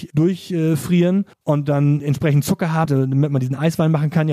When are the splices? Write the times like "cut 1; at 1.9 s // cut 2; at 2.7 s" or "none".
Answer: cut 1; at 1.3 s // cut 2; at 2.9 s